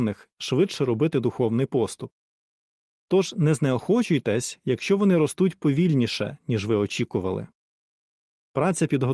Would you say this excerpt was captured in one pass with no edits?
yes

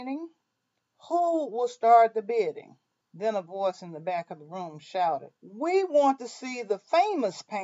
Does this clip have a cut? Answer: yes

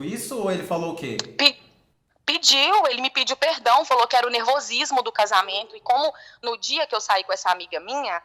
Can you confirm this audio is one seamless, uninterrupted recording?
yes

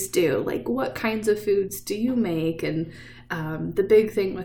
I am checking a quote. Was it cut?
no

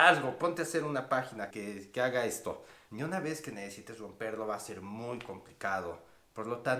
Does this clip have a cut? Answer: yes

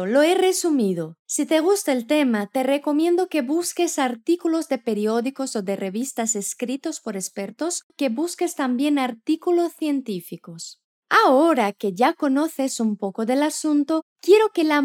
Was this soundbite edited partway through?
yes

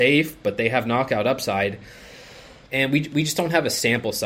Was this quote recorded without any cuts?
no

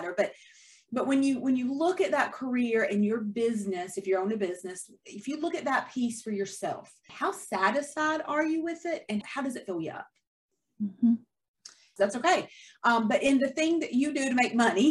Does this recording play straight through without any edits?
no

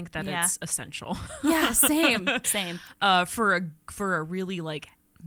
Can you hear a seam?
yes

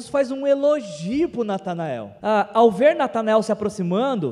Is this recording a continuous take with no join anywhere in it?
no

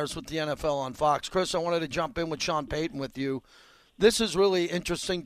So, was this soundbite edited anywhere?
no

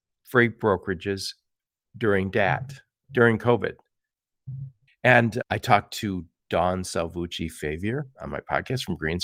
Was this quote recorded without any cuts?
no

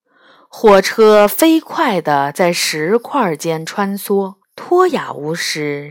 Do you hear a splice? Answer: yes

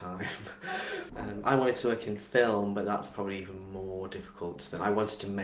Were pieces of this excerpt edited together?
yes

